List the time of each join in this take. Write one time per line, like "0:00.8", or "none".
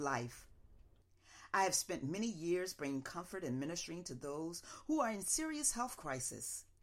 0:01.5

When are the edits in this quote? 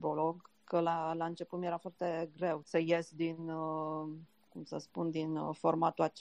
0:02.6

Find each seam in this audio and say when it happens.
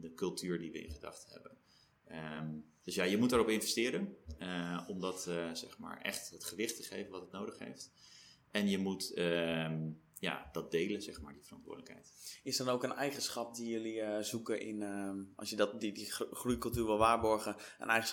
none

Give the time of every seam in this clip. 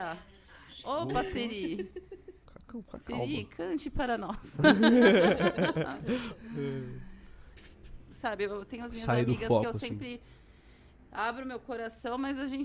0:07.6

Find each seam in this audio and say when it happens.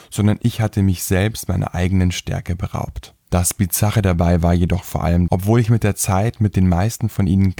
0:03.2
0:05.3

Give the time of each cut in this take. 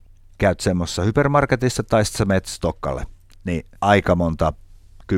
0:03.8

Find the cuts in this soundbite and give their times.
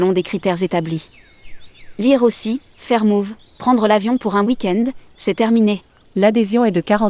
0:06.0

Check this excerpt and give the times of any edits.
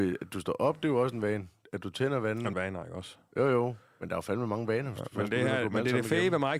0:02.5

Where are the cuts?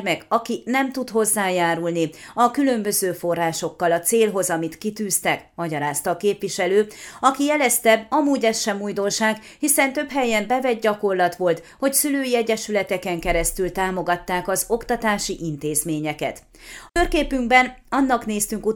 0:16.9

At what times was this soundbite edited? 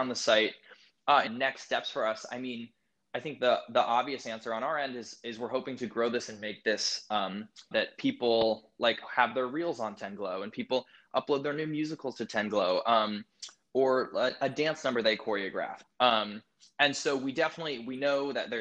0:01.3
0:07.7
0:15.8

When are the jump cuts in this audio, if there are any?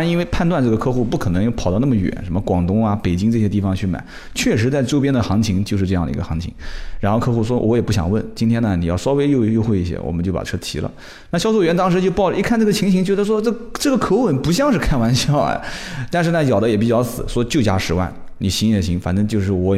none

